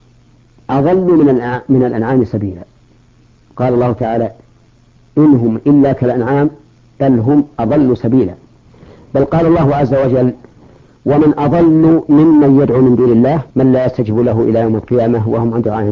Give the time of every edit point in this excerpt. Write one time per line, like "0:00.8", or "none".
0:13.5